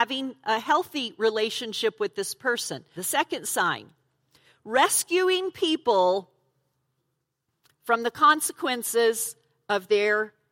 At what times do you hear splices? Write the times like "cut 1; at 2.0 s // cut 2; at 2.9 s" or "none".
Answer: cut 1; at 3.0 s